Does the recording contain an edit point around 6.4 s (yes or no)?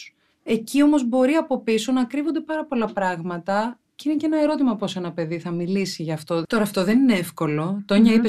yes